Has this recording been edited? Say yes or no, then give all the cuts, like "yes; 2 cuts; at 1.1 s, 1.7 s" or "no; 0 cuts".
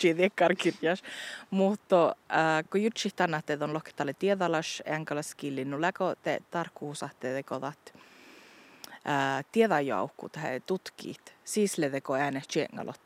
no; 0 cuts